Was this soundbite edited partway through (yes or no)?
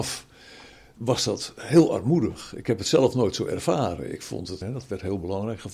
yes